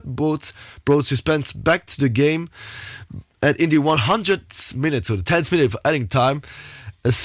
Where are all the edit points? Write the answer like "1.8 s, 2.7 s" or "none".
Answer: none